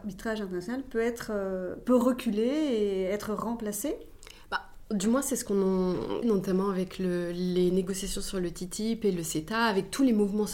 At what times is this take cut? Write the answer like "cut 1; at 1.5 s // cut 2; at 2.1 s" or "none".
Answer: cut 1; at 6.2 s